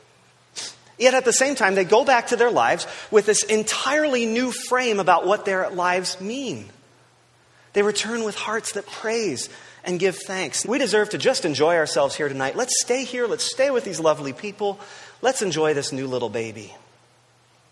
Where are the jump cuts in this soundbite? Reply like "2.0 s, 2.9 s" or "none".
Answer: 10.6 s